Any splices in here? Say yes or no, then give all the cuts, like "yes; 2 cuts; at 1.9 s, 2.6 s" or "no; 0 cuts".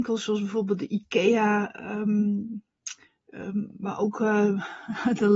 no; 0 cuts